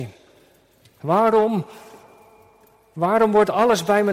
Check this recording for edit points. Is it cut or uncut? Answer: uncut